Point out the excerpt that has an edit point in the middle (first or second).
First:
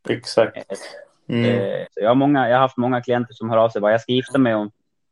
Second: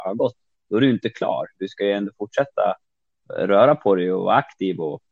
first